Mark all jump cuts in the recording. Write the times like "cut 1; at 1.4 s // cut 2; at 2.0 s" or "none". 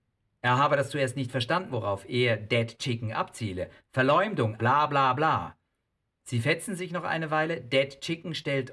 cut 1; at 1.7 s // cut 2; at 4.6 s